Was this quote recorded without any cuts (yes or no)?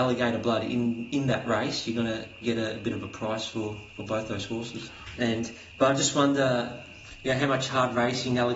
no